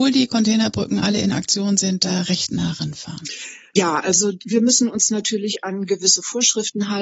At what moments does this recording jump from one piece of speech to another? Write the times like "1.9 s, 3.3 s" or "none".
none

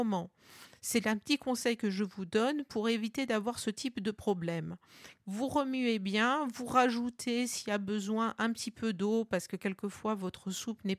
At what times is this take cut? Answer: 5.2 s

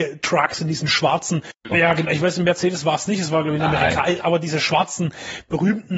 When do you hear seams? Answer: 1.7 s

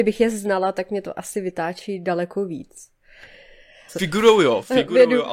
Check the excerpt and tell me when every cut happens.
3.9 s

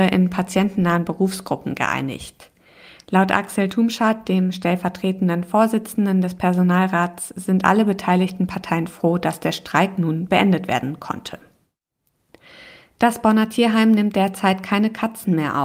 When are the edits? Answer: none

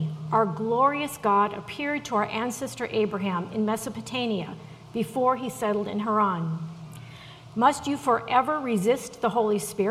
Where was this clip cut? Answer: 7.5 s

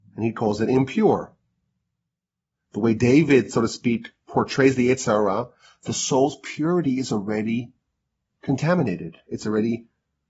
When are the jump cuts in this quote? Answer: none

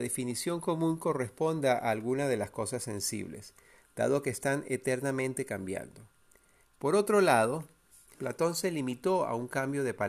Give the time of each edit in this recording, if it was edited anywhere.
6.6 s, 8.1 s

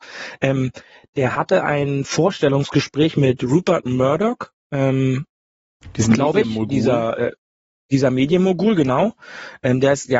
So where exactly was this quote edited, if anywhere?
none

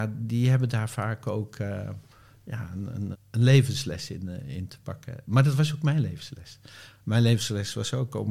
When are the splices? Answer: 3.1 s

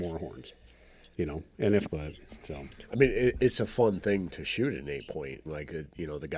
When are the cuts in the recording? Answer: 1.8 s, 5.5 s

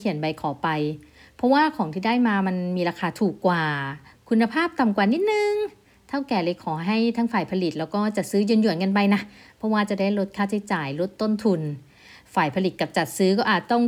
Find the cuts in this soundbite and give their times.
none

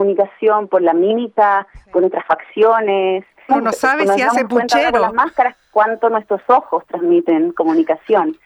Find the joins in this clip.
3.5 s

